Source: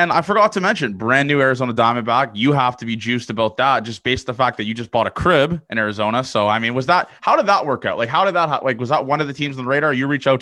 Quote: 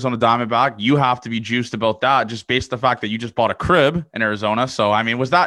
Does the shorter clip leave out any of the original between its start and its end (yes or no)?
no